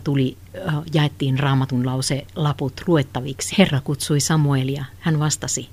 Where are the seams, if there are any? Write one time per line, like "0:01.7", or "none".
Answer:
0:03.5